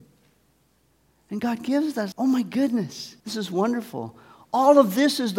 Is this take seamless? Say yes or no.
no